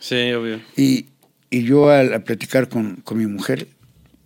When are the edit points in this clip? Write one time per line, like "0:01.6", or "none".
none